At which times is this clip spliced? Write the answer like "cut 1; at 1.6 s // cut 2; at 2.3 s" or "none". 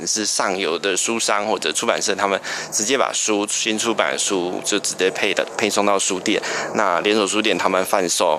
none